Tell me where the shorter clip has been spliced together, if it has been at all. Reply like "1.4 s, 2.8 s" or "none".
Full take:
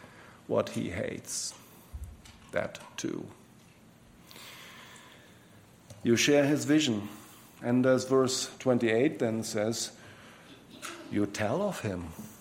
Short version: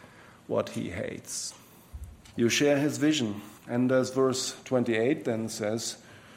2.3 s, 3.6 s